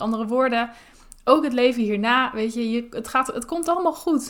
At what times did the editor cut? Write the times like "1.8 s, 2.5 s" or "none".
none